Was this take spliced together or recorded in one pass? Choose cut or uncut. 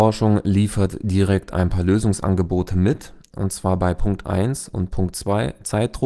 uncut